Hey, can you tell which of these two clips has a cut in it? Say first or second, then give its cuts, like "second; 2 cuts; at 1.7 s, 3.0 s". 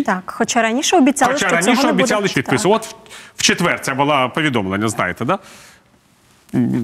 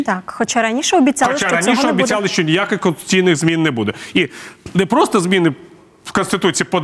first; 1 cut; at 2.3 s